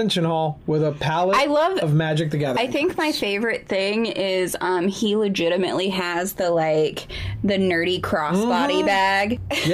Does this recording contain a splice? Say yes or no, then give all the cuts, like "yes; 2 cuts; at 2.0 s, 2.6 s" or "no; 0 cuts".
no; 0 cuts